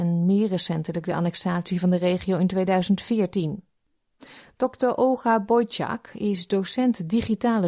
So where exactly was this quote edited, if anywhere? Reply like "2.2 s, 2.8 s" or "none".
none